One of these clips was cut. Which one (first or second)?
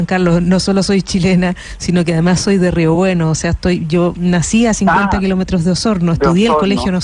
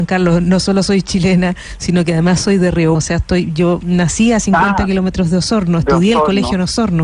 second